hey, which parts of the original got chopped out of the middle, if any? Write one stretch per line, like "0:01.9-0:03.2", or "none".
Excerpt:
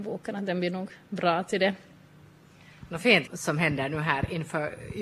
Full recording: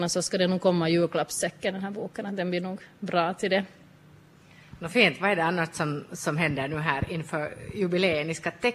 0:05.2-0:06.1